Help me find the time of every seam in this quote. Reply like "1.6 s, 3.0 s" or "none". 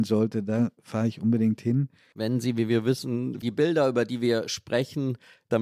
2.1 s, 3.4 s